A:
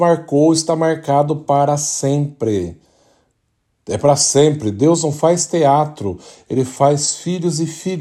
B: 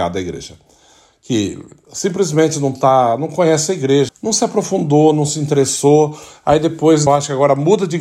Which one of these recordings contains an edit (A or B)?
B